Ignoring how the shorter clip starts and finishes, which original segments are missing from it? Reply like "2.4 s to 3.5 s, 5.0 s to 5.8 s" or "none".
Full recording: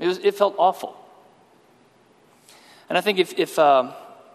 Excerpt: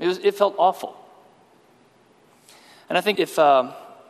3.2 s to 3.4 s

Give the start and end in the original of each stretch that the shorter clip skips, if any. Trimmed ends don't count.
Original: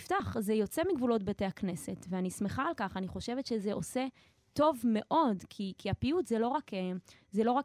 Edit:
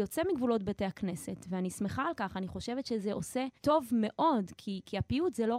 4.2 s to 4.5 s

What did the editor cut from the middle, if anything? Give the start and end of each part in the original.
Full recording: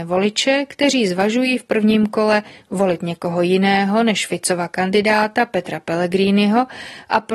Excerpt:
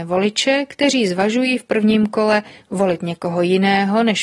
none

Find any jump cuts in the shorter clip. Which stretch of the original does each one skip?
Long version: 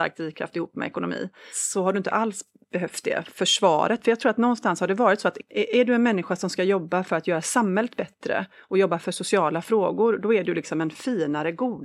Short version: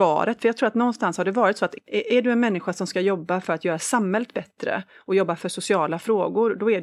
none

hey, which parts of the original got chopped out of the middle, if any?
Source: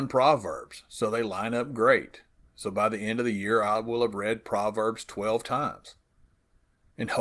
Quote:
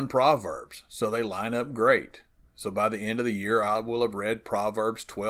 none

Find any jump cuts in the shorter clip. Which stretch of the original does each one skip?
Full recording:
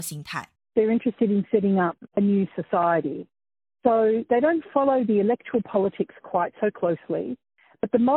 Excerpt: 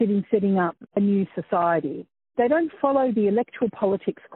3.6 s to 4.3 s

